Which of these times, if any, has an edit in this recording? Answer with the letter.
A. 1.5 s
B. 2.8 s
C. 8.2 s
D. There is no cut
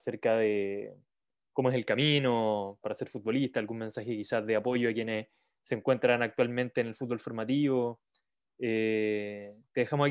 B